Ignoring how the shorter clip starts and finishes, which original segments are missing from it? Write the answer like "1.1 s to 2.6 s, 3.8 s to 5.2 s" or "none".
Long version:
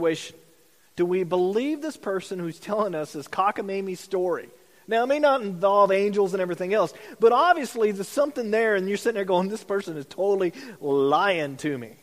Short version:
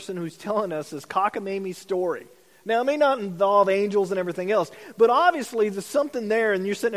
none